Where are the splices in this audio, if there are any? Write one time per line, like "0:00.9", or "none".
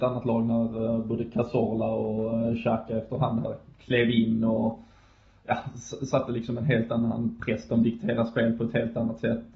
none